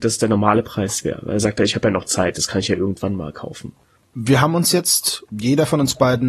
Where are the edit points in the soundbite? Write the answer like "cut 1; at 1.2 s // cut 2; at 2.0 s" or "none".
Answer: none

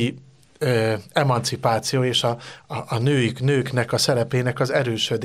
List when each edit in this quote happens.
none

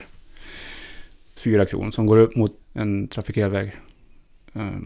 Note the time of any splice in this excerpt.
cut 1; at 1.4 s // cut 2; at 2.6 s

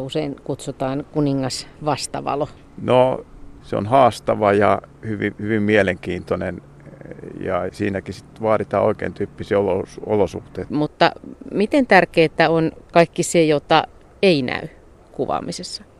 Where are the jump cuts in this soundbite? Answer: cut 1; at 7.7 s // cut 2; at 10.7 s

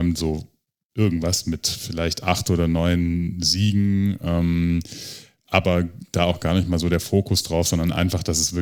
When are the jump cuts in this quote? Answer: none

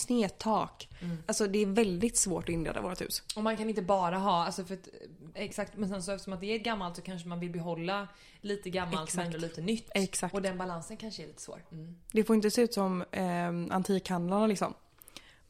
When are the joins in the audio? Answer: cut 1; at 5.3 s // cut 2; at 11.7 s

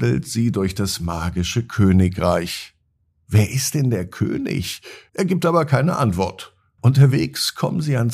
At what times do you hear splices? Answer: cut 1; at 5.1 s // cut 2; at 6.8 s

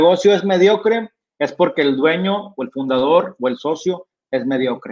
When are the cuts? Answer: none

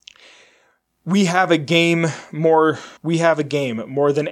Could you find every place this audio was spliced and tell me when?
cut 1; at 3.0 s

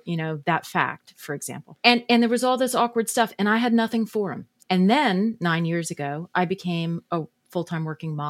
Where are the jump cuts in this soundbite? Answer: cut 1; at 1.8 s // cut 2; at 4.6 s

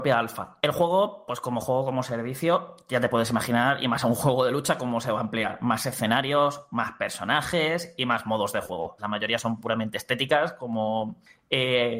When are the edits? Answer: cut 1; at 9.0 s

